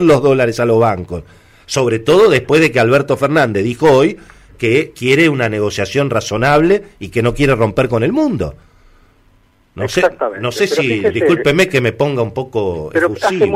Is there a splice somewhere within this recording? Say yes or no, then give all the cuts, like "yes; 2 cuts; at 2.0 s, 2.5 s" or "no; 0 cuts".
no; 0 cuts